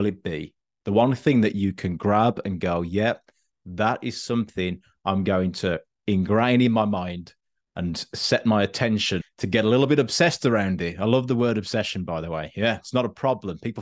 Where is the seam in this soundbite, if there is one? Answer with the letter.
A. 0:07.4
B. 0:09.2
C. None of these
B